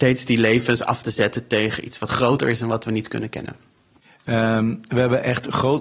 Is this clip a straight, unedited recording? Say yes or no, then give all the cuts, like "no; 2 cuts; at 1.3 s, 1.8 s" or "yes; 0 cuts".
yes; 0 cuts